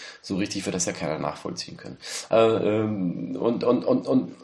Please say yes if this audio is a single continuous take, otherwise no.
no